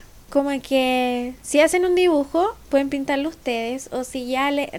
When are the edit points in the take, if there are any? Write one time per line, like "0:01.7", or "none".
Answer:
none